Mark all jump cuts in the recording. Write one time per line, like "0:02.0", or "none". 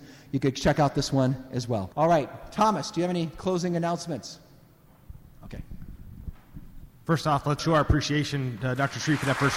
0:01.9
0:07.6